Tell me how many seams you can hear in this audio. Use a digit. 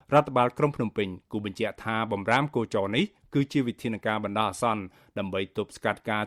0